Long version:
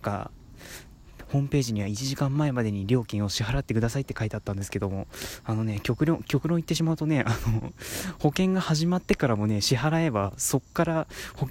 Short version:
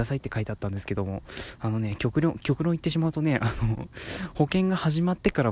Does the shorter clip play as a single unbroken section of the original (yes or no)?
yes